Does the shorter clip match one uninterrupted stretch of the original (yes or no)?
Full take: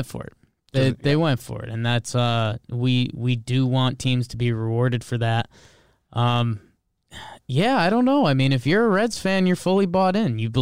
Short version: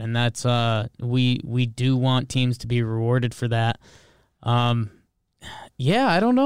yes